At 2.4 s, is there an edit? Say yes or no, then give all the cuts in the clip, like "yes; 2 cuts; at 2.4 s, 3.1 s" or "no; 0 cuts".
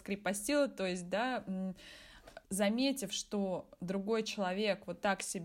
yes; 1 cut; at 2.4 s